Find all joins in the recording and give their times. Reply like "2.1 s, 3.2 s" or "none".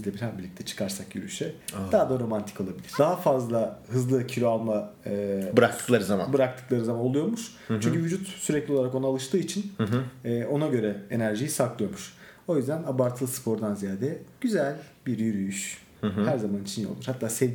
3.0 s

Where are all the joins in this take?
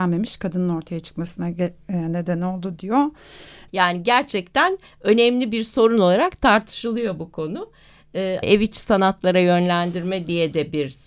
3.7 s, 8.4 s

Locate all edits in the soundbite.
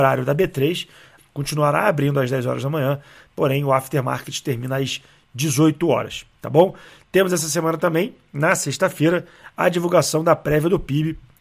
1.2 s

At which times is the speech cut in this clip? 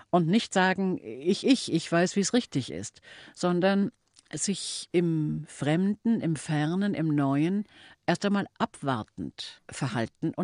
1.4 s

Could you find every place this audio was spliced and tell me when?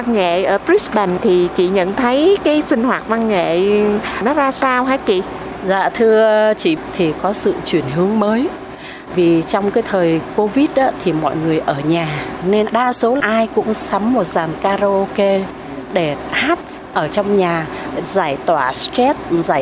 6.9 s

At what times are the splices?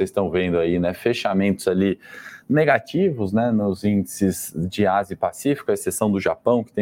none

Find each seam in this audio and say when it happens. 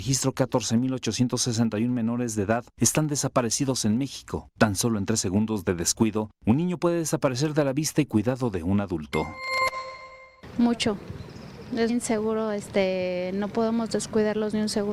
11.9 s

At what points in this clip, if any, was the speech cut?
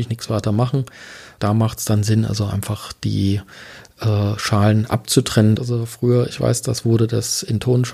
1.4 s, 5.6 s

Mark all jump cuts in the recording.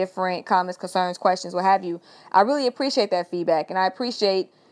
none

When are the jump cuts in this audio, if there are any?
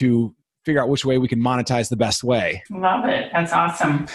2.7 s

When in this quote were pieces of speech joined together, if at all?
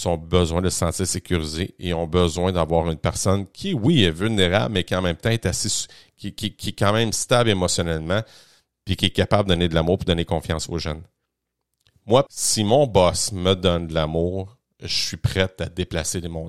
12.3 s

